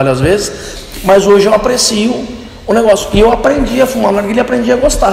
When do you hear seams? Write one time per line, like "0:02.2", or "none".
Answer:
none